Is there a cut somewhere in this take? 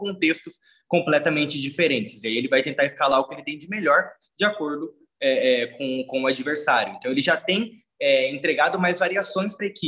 no; 0 cuts

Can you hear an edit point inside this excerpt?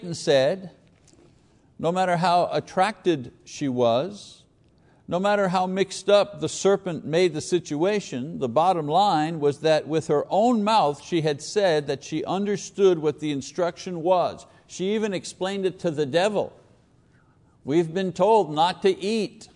no; 0 cuts

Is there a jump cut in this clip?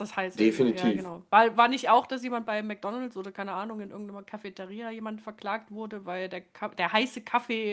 no; 0 cuts

